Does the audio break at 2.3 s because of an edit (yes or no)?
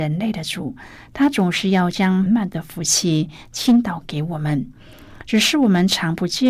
yes